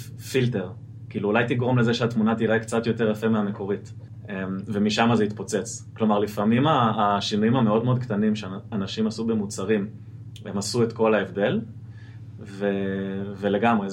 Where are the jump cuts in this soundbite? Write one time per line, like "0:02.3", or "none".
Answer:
none